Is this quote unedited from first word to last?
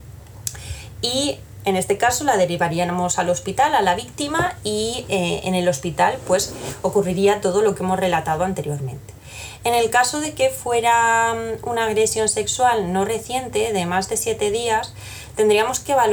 yes; 0 cuts

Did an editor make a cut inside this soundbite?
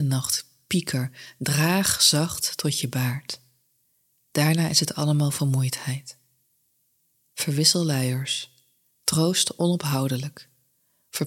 no; 0 cuts

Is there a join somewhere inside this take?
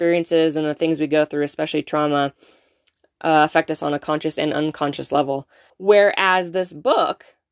yes; 1 cut; at 5.7 s

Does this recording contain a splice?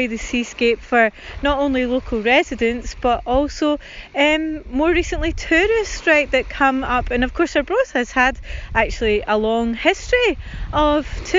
no; 0 cuts

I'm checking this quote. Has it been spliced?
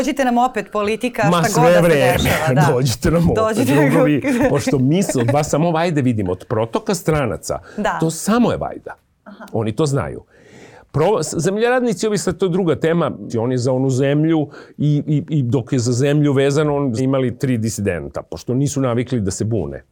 yes; 2 cuts; at 13.3 s, 17.0 s

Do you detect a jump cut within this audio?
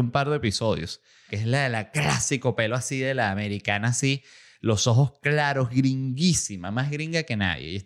yes; 1 cut; at 1.3 s

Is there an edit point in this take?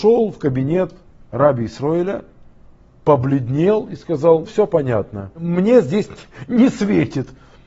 yes; 1 cut; at 4.5 s

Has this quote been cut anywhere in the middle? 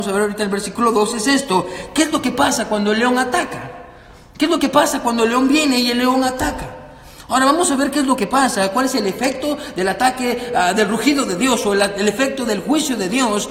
no; 0 cuts

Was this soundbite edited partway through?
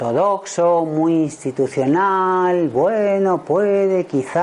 no; 0 cuts

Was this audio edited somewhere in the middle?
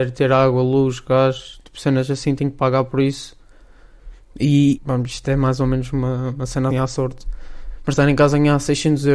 yes; 2 cuts; at 4.8 s, 6.7 s

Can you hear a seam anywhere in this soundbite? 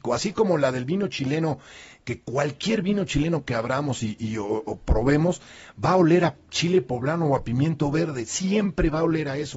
no; 0 cuts

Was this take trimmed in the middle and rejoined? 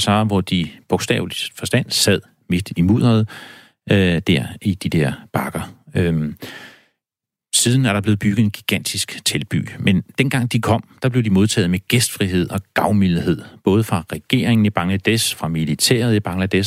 no; 0 cuts

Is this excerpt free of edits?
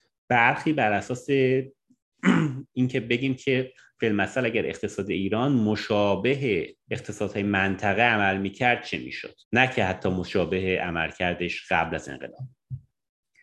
no; 2 cuts; at 6.8 s, 9.4 s

